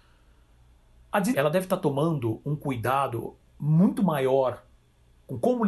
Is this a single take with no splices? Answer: no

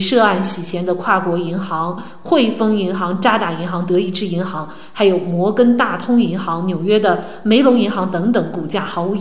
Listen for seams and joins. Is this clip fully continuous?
yes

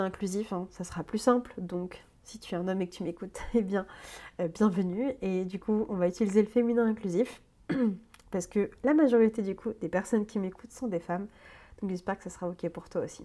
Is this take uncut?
yes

